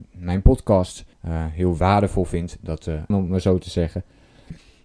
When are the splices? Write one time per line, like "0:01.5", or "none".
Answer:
0:01.1
0:03.1

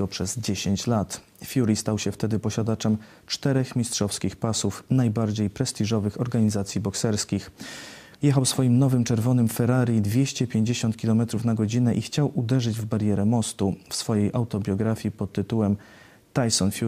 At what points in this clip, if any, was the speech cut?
0:08.1

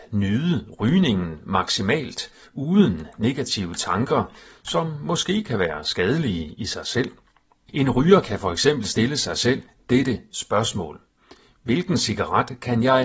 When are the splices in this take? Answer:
0:07.7

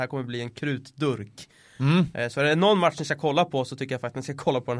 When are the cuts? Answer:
none

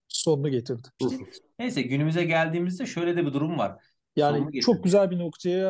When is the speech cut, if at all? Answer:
0:01.0
0:04.1

